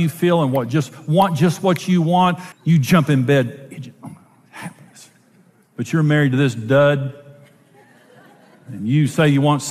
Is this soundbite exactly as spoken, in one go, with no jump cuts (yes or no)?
no